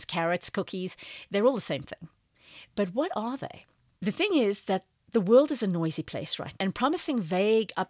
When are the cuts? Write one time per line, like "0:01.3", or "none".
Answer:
0:04.0
0:06.6